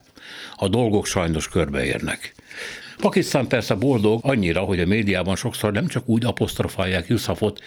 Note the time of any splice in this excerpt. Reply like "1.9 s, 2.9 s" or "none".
3.0 s, 4.2 s